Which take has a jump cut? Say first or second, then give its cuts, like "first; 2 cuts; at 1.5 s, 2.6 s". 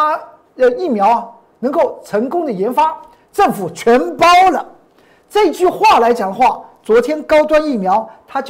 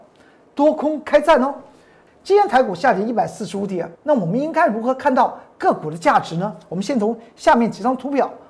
second; 2 cuts; at 2.1 s, 3.9 s